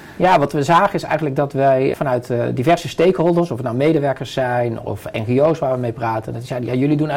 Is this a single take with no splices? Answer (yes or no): no